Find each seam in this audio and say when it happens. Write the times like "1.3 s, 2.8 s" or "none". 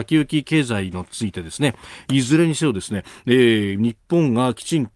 2.0 s